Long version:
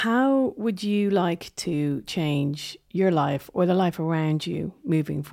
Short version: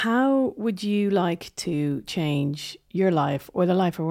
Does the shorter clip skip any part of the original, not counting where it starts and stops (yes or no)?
no